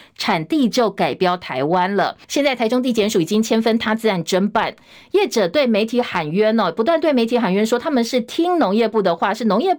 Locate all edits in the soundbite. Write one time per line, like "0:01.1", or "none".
0:02.2